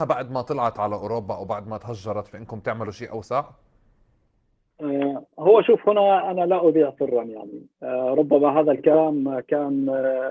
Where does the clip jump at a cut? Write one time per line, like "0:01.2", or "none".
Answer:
0:05.3